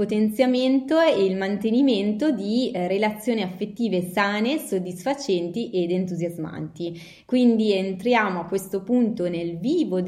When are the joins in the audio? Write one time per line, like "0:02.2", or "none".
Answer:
none